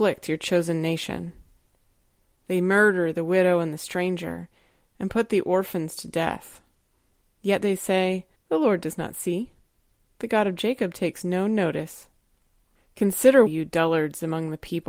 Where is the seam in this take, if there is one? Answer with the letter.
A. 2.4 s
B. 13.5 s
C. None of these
B